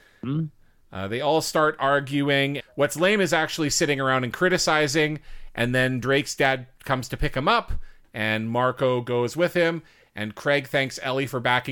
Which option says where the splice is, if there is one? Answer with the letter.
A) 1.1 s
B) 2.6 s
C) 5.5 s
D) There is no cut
B